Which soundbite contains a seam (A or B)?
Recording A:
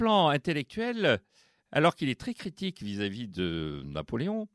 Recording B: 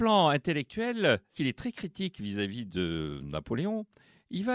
B